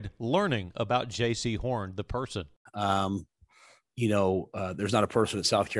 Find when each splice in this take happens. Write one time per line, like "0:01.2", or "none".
0:02.7